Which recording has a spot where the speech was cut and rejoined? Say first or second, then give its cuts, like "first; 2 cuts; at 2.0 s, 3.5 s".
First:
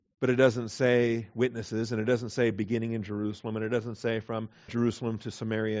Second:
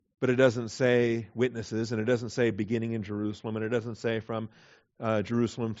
first; 1 cut; at 4.7 s